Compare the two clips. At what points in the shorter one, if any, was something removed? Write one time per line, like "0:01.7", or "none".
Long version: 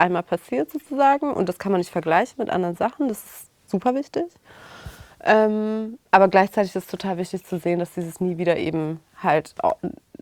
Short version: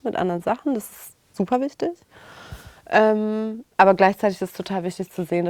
none